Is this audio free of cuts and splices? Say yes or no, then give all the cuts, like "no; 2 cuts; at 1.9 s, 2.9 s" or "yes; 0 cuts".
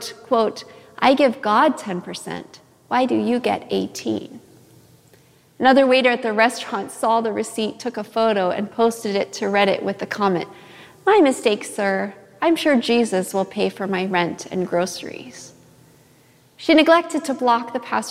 yes; 0 cuts